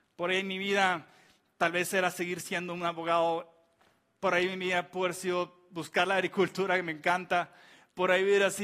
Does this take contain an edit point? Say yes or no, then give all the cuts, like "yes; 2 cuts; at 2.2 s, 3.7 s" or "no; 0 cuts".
no; 0 cuts